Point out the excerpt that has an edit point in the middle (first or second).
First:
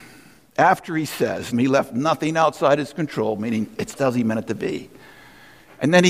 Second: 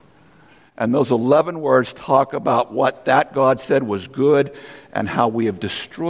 first